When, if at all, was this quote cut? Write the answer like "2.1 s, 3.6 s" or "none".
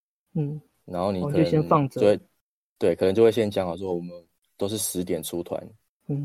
none